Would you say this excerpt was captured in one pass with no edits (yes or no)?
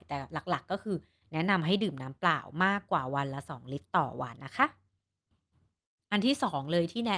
no